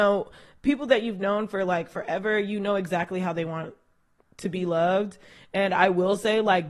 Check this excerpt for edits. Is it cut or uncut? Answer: uncut